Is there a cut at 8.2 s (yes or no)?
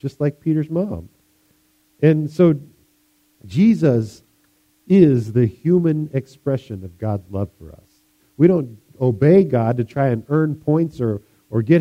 yes